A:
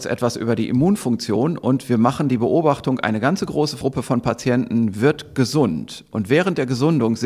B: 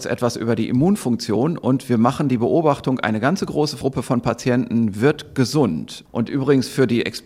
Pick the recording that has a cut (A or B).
B